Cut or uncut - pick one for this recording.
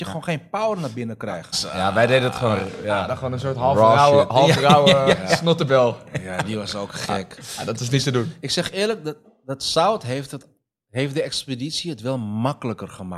cut